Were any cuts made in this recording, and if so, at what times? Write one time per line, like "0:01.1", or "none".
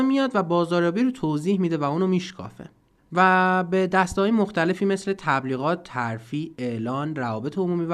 none

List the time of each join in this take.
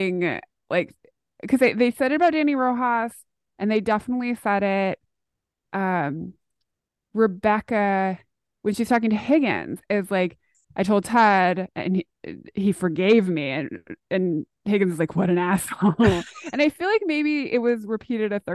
none

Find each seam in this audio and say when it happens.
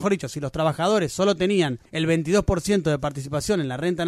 0:01.9

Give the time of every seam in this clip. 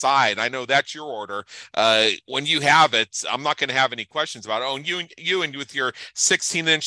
none

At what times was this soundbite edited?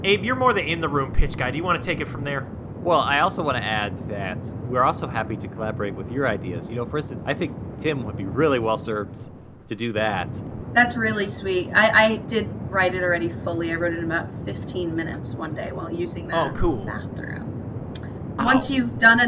0:07.2
0:18.4

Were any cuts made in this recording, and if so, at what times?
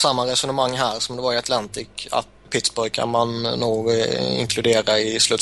0:02.4

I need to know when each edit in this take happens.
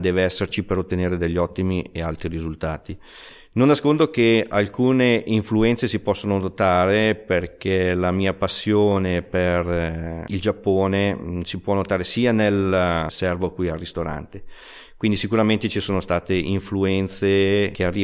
0:13.1

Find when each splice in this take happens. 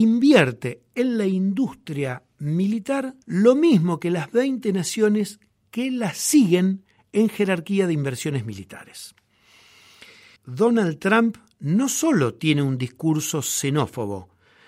0:03.2
0:10.4

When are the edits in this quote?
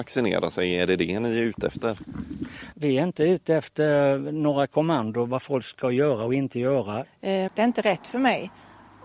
0:02.7
0:07.5

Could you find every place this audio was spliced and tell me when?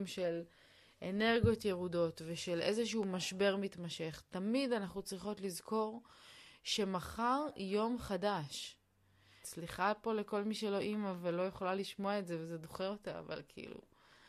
0:09.4

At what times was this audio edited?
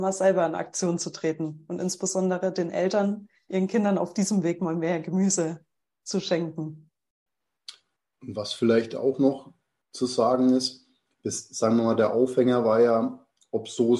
none

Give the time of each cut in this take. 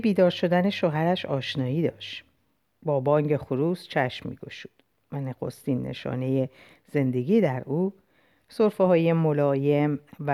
none

